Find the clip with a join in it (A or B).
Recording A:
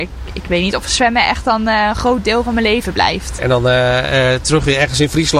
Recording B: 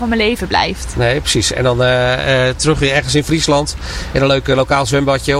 A